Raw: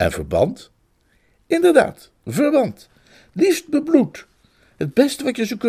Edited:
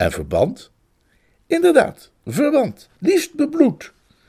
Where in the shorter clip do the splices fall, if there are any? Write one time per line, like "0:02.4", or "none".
0:02.9

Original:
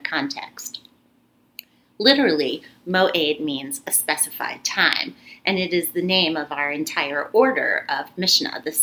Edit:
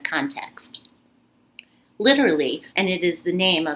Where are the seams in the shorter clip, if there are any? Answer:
0:02.7

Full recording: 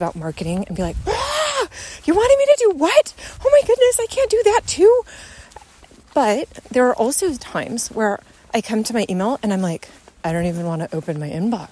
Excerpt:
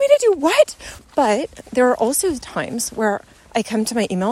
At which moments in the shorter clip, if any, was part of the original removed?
0:01.0

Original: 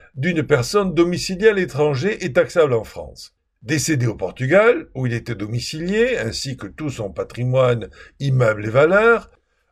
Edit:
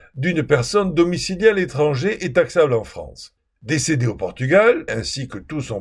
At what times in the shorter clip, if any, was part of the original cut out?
0:04.9

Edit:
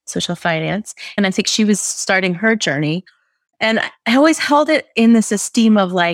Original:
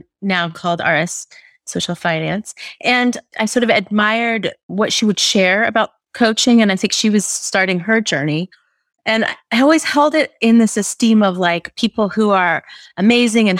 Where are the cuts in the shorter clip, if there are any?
0:01.2

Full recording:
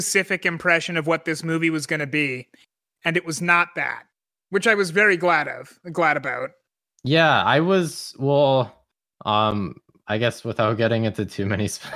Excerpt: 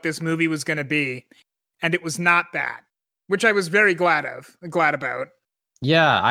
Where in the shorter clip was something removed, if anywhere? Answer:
none

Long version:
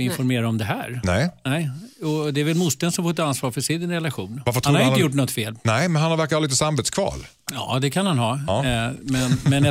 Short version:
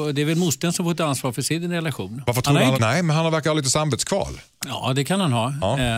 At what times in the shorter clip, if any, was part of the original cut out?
0:02.7

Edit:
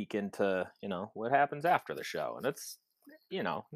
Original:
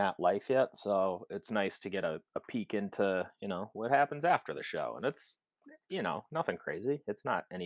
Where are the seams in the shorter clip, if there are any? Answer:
none

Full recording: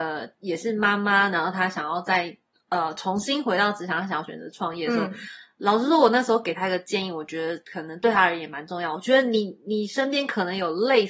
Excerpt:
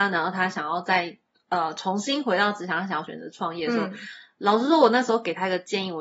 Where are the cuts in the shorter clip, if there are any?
none

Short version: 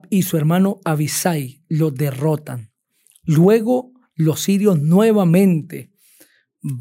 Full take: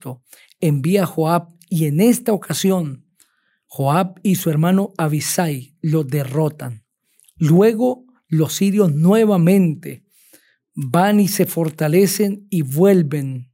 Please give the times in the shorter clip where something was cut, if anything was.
none

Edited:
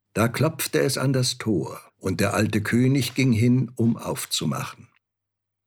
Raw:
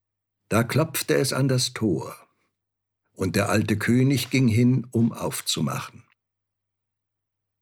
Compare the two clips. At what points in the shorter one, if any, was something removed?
0:01.9

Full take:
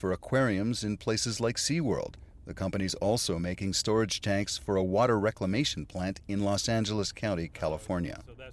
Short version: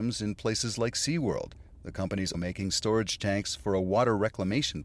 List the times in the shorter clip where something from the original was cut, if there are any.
0:02.3

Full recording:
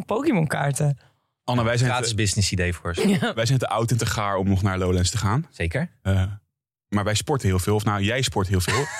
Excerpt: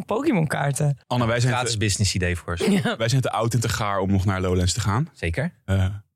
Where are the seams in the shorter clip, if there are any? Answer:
0:01.0

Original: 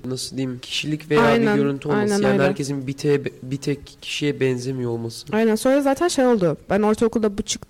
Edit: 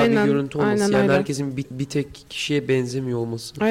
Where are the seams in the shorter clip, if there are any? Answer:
0:01.6

